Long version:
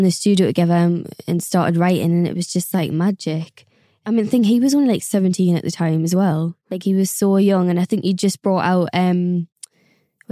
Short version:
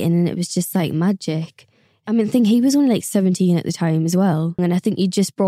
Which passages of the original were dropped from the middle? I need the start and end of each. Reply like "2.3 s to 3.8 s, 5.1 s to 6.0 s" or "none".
6.6 s to 7.6 s